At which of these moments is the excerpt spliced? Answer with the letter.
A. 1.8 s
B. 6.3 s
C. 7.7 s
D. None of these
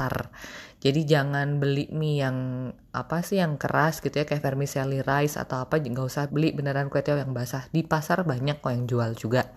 B